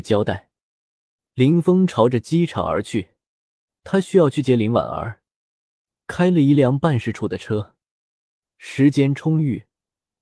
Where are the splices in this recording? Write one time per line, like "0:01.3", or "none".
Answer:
0:03.7

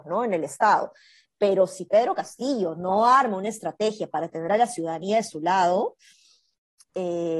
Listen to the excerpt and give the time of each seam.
none

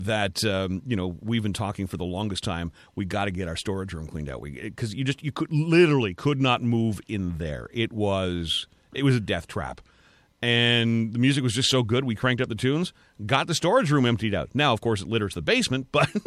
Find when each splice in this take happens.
none

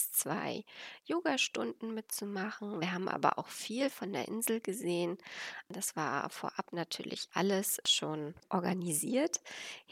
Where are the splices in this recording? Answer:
none

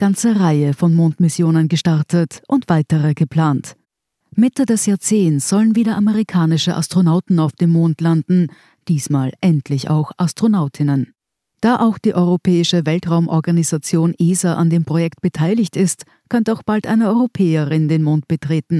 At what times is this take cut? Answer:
0:04.2

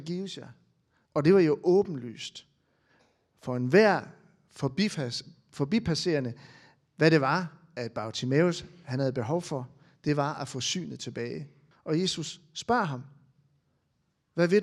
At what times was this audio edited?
0:01.1
0:11.7

